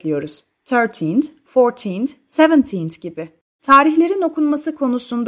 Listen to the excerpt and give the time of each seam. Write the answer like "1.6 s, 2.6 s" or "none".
3.6 s